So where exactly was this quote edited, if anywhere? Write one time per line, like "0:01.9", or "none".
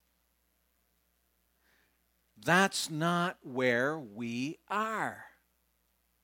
none

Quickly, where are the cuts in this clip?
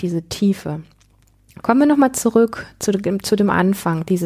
0:01.6

